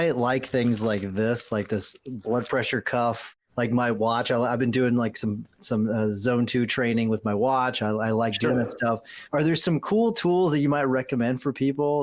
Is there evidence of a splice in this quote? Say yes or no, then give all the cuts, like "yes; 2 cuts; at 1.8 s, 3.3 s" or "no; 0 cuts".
no; 0 cuts